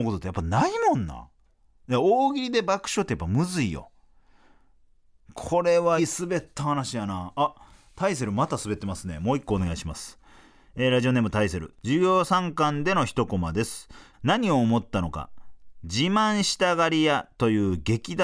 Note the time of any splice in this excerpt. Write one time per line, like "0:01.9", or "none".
0:06.0
0:14.1